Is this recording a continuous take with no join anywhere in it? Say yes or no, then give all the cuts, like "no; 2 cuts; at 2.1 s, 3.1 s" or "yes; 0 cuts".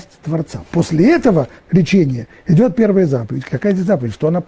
no; 2 cuts; at 1.6 s, 3.5 s